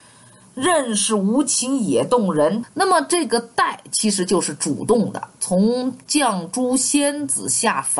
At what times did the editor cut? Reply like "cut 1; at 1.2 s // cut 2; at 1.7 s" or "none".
cut 1; at 2.6 s